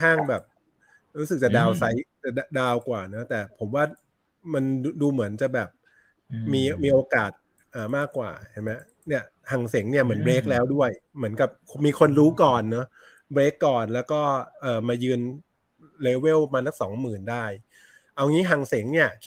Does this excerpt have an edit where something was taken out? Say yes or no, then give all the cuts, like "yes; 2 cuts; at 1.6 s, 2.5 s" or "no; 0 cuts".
no; 0 cuts